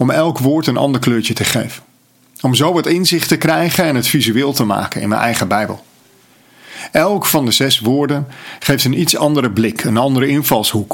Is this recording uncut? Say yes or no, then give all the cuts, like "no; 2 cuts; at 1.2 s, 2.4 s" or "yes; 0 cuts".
yes; 0 cuts